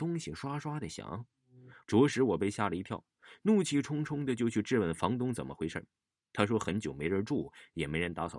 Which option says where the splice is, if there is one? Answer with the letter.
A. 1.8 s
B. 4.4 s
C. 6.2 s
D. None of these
A